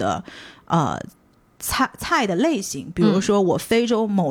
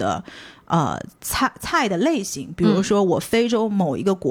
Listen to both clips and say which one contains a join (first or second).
second